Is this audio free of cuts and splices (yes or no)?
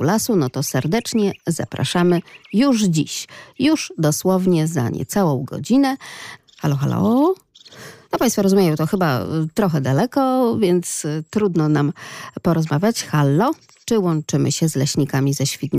no